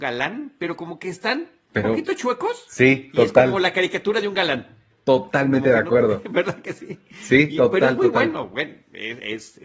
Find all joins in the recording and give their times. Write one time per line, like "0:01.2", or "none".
none